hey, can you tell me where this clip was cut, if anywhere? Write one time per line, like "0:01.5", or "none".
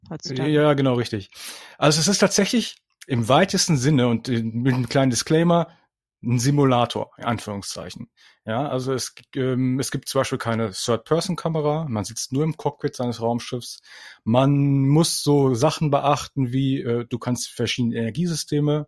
none